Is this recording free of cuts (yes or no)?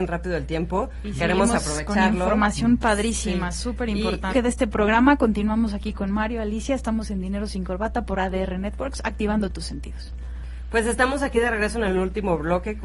no